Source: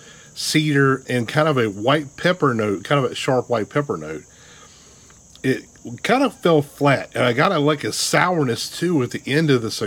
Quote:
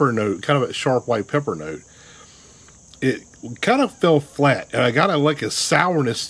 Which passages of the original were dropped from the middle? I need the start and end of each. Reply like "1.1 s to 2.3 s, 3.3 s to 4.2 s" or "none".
none